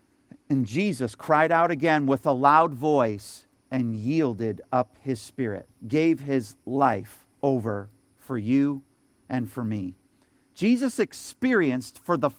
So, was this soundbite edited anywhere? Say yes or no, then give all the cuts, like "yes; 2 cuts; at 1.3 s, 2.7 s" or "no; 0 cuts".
yes; 2 cuts; at 5.8 s, 7.3 s